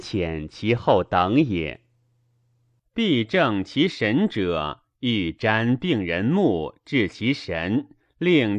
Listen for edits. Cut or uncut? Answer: cut